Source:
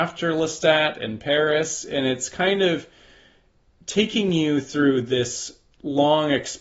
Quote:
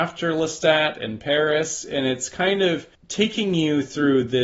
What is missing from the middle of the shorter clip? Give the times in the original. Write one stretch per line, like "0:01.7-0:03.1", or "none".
0:02.9-0:03.7